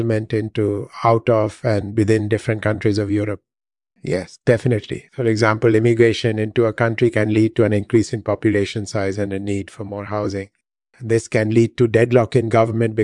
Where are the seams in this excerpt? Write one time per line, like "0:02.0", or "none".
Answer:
0:03.9
0:05.1